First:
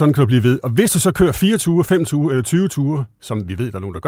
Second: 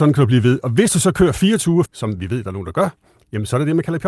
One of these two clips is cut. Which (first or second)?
second